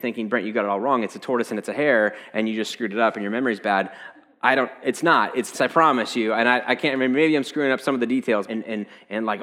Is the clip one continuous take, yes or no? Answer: no